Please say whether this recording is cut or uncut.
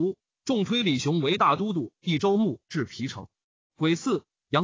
cut